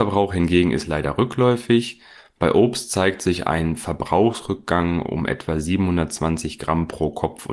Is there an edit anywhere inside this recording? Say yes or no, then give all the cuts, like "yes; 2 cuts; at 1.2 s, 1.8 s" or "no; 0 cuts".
no; 0 cuts